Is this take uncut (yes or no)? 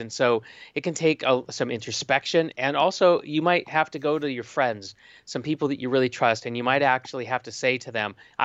yes